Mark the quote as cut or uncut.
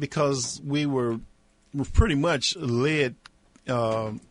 uncut